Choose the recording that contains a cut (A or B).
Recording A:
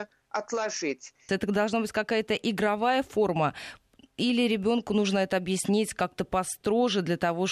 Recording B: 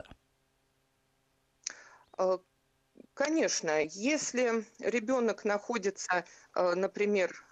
A